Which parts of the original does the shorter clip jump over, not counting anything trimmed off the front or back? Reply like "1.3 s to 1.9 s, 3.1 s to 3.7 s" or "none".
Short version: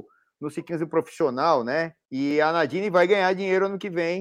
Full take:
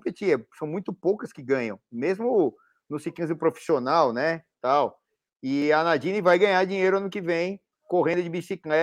4.5 s to 5.4 s